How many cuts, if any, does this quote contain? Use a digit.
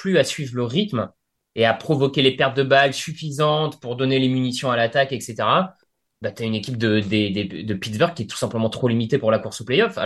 0